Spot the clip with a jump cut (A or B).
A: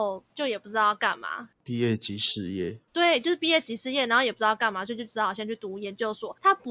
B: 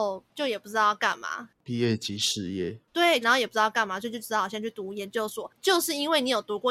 B